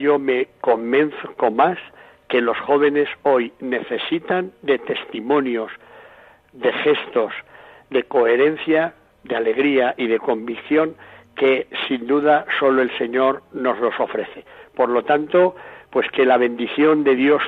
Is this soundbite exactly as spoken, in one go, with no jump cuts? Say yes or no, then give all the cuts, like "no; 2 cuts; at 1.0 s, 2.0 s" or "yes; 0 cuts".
yes; 0 cuts